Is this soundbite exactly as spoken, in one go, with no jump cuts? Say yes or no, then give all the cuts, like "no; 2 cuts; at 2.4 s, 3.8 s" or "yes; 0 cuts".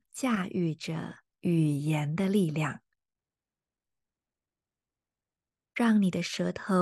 no; 1 cut; at 1.3 s